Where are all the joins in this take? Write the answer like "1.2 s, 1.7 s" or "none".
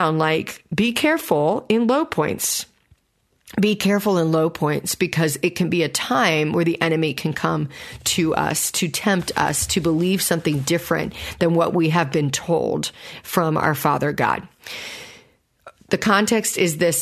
none